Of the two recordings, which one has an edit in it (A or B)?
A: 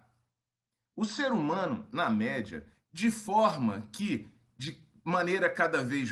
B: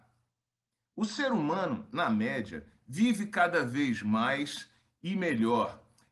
A